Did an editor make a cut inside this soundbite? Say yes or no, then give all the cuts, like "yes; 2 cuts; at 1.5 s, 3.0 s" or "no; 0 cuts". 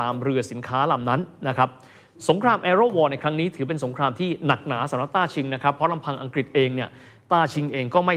no; 0 cuts